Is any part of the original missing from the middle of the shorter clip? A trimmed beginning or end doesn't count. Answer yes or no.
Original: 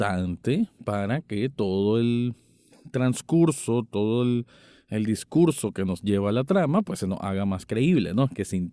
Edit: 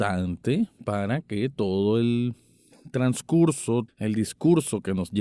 yes